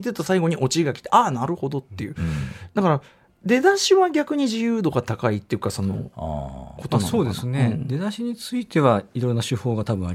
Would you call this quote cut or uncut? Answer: uncut